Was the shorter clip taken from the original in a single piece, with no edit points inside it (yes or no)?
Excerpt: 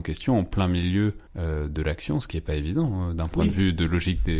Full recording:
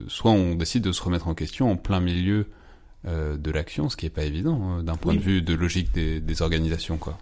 no